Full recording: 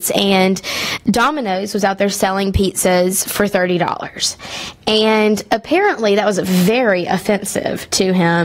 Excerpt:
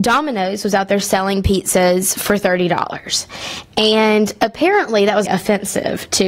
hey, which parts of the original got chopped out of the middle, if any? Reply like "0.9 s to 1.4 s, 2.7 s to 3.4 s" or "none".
6.4 s to 7.1 s